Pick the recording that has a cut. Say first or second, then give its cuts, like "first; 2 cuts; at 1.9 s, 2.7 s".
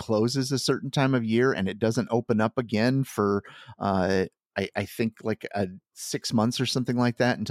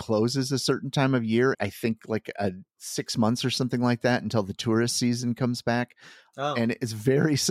second; 1 cut; at 1.5 s